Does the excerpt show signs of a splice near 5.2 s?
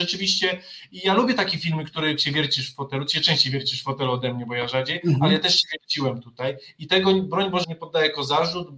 no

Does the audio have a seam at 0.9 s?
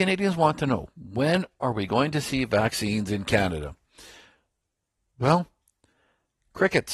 no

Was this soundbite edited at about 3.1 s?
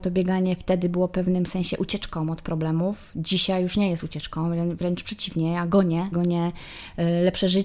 no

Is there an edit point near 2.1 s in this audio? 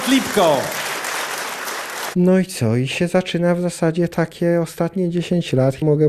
yes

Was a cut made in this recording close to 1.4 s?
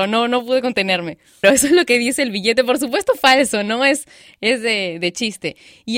yes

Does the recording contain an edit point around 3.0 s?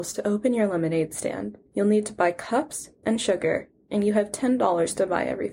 yes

